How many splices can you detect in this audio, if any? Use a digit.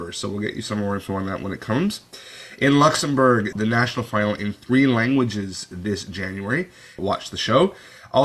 2